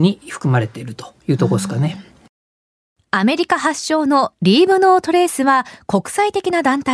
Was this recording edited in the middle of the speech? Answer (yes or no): no